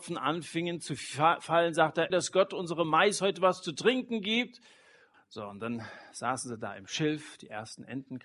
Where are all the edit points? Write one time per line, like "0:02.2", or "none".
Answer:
0:02.1
0:05.1